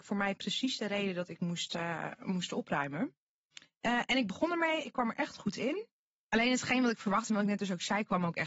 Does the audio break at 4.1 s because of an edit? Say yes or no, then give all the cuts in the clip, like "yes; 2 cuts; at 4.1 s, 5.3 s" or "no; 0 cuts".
no; 0 cuts